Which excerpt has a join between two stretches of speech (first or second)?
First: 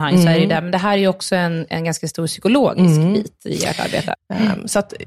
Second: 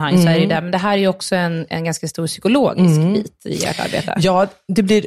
first